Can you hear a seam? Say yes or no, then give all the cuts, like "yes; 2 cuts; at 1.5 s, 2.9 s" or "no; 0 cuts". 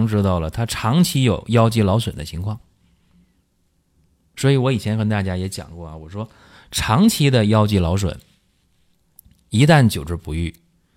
no; 0 cuts